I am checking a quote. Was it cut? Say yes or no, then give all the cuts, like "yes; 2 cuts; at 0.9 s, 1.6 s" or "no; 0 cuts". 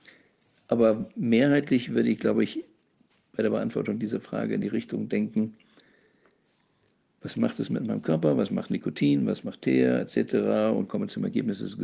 no; 0 cuts